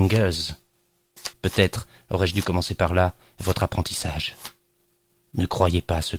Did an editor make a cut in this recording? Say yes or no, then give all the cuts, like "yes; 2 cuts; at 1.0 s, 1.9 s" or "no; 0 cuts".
yes; 1 cut; at 1.3 s